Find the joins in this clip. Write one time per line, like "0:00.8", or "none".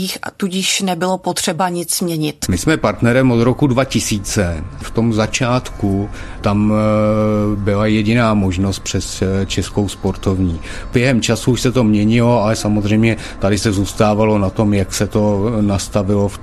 0:02.5